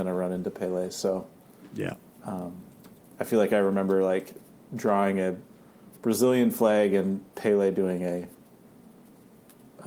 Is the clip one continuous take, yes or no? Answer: yes